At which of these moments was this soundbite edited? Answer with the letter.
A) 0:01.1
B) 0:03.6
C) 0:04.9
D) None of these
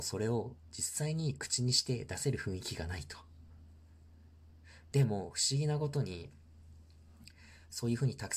C